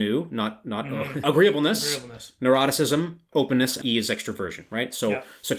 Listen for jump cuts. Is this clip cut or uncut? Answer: cut